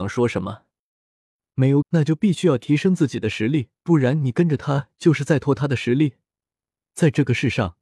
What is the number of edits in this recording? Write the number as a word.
two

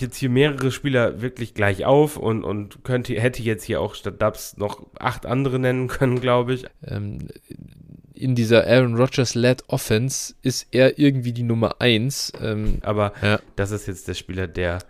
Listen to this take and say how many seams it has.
two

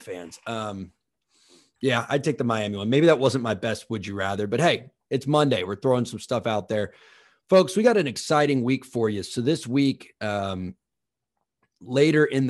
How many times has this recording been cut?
zero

